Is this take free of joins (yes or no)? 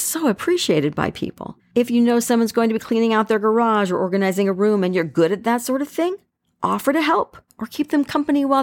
no